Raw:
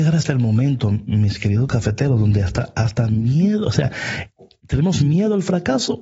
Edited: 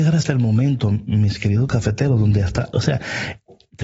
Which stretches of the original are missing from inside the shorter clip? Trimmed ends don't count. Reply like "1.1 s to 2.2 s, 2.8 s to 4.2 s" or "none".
2.7 s to 3.6 s